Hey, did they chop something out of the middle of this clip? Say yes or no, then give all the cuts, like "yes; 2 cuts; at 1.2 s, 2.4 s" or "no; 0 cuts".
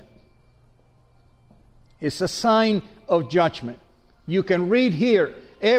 no; 0 cuts